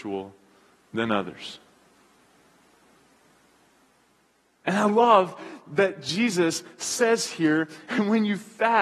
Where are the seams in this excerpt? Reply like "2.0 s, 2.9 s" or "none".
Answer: none